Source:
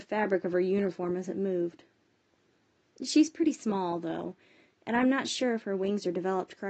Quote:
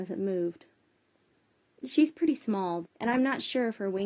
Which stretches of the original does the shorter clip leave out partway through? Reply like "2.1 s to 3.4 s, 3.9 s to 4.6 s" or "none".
4.0 s to 4.7 s